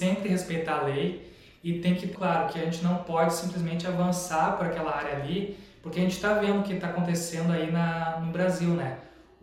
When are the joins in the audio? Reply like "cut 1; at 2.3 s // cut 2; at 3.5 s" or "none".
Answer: cut 1; at 2.1 s